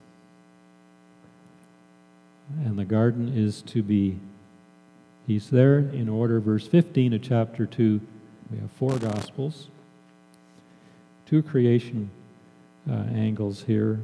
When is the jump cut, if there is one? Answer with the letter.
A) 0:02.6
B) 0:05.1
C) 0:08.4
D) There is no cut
C